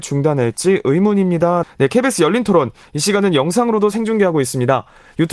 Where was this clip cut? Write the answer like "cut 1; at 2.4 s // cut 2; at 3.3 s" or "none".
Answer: cut 1; at 1.6 s